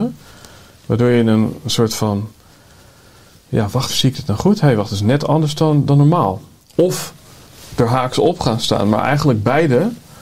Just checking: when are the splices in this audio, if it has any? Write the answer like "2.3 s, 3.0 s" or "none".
3.9 s